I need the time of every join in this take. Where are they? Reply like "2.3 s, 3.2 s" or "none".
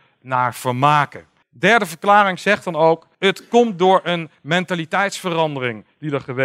1.4 s, 3.1 s

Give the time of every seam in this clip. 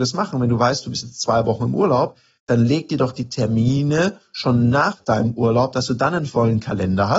none

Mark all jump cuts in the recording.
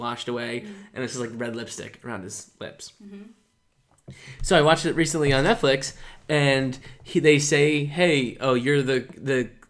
none

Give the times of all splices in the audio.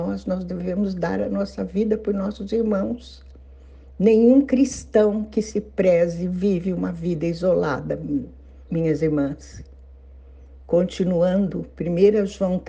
8.7 s, 10.6 s

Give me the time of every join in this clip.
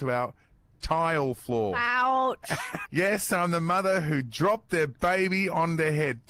2.9 s

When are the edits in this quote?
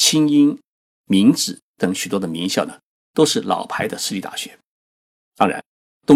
none

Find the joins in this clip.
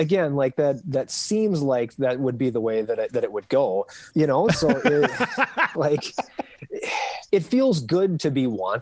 4.1 s, 5.7 s, 7.3 s

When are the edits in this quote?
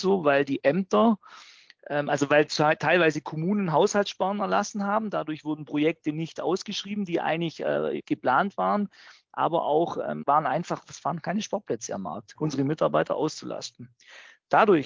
10.2 s, 12.4 s

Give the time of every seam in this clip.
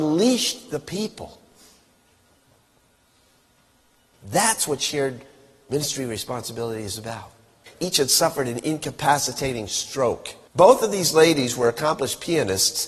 7.7 s, 10.5 s

